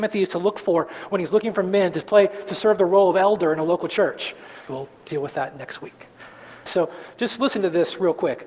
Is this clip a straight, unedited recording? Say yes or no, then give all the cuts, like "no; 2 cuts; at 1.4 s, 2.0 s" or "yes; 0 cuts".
no; 2 cuts; at 4.7 s, 6.7 s